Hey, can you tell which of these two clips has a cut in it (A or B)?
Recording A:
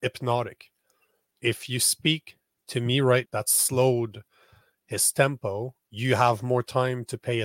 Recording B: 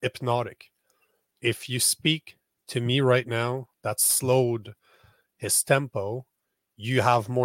A